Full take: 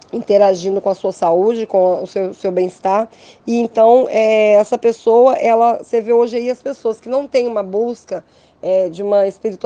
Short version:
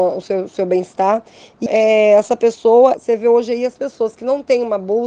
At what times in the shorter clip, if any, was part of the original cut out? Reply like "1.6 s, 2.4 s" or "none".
1.7 s, 2.9 s